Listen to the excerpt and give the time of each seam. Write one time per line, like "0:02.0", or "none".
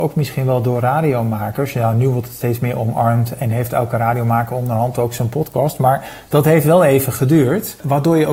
none